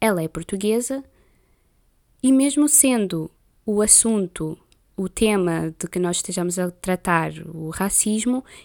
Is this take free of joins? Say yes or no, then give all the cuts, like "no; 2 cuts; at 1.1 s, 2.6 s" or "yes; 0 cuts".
yes; 0 cuts